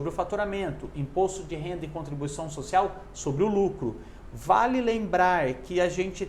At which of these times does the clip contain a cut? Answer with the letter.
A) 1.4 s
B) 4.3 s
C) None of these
B